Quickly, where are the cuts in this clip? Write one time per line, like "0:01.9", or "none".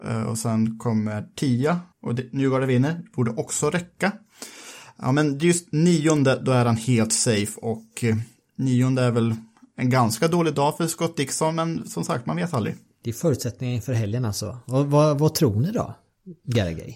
0:01.9